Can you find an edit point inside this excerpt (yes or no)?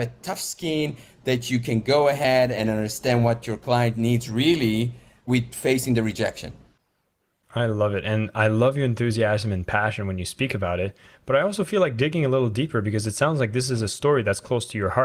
no